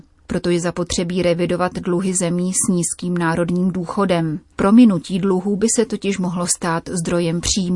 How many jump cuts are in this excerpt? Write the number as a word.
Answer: zero